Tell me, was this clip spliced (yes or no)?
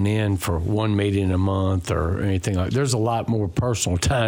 no